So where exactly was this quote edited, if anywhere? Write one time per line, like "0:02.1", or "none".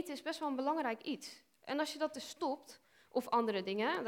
none